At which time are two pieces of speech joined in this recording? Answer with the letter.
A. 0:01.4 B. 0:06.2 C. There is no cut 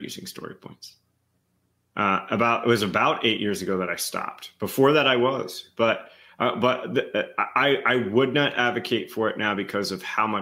C